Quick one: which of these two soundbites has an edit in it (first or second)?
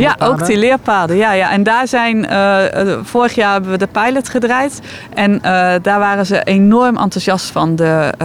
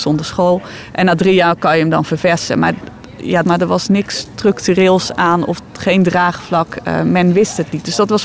second